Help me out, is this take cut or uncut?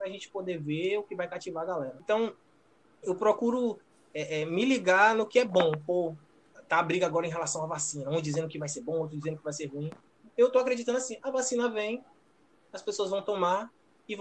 uncut